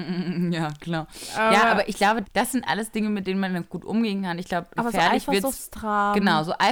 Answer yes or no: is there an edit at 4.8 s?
yes